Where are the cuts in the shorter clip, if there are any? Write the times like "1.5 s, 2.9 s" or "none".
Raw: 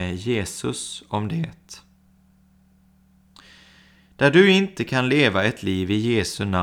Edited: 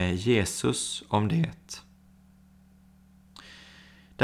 none